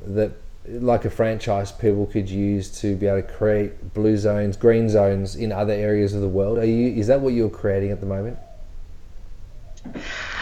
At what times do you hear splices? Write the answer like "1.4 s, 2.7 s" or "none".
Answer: none